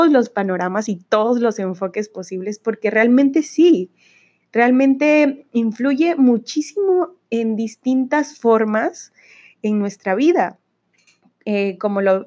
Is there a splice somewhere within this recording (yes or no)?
no